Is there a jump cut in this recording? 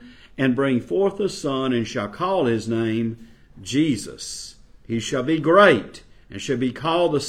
no; 0 cuts

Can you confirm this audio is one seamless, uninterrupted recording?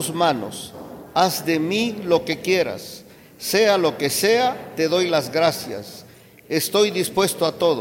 yes; 0 cuts

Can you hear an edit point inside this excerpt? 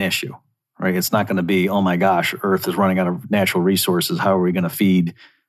no; 0 cuts

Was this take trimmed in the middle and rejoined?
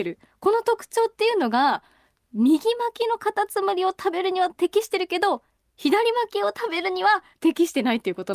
no; 0 cuts

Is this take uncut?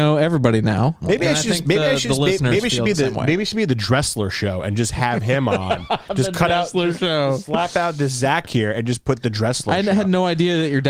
no; 1 cut; at 1.0 s

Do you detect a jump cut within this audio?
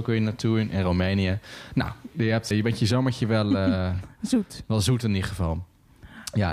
yes; 1 cut; at 2.5 s

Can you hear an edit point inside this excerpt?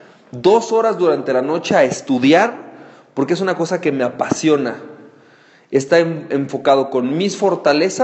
no; 0 cuts

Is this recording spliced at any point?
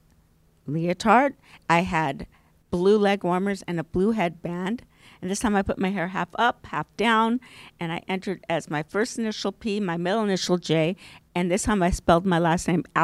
no; 0 cuts

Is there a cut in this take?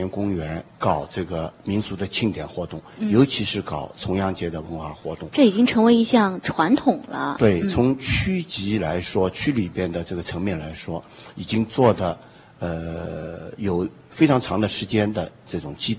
no; 0 cuts

